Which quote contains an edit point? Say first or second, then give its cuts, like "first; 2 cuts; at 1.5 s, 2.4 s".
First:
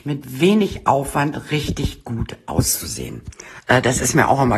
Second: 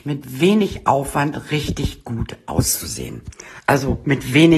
first; 1 cut; at 3.6 s